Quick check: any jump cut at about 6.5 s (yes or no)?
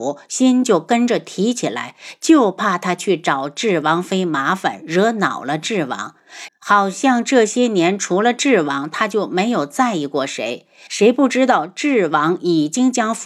yes